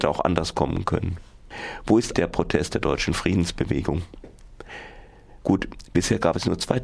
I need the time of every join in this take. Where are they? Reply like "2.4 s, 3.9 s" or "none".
2.1 s, 5.4 s